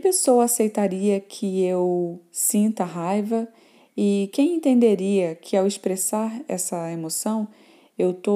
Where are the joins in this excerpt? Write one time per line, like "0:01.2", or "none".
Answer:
none